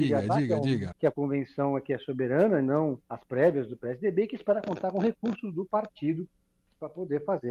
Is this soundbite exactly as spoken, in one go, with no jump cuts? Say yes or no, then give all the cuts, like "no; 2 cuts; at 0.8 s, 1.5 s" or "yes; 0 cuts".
no; 2 cuts; at 0.9 s, 3.0 s